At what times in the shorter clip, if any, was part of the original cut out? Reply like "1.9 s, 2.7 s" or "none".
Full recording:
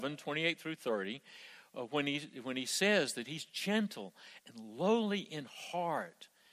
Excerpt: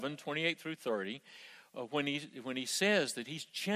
none